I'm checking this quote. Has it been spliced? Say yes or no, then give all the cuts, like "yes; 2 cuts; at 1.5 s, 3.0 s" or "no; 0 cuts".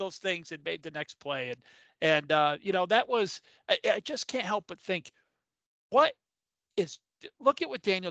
no; 0 cuts